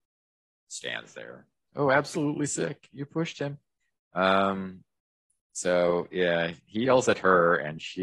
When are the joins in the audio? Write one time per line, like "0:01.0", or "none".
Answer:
0:01.7
0:04.0